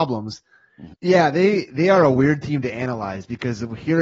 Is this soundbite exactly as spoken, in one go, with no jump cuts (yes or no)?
no